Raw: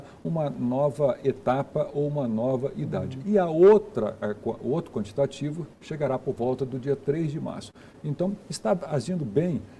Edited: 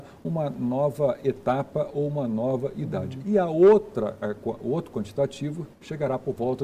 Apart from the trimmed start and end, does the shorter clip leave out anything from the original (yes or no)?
no